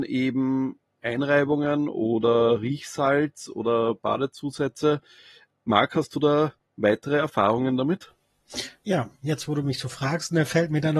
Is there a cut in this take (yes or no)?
no